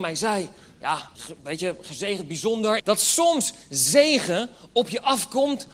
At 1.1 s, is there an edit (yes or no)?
yes